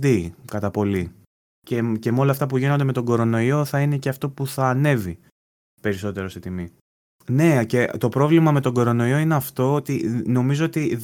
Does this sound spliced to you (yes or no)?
yes